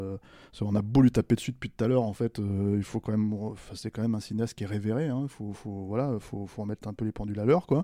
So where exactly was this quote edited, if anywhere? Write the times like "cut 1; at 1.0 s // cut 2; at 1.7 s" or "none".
none